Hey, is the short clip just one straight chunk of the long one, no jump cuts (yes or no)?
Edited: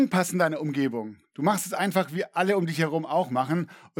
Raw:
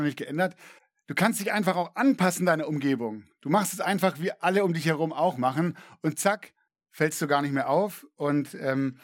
yes